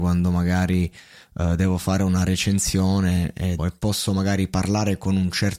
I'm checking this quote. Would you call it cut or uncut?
cut